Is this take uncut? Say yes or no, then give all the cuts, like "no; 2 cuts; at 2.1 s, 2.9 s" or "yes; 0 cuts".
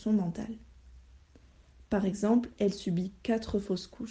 yes; 0 cuts